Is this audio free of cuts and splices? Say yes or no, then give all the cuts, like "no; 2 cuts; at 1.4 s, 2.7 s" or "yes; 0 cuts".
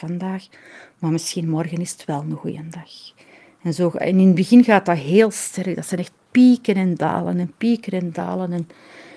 yes; 0 cuts